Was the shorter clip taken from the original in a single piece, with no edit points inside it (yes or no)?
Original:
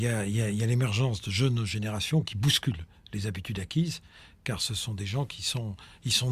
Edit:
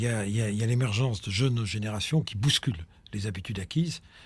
yes